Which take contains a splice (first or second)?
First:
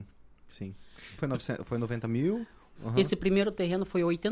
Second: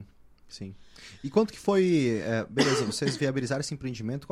first